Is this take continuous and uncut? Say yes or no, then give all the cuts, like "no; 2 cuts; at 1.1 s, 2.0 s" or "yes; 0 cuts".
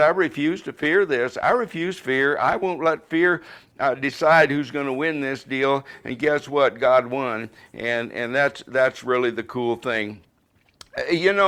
yes; 0 cuts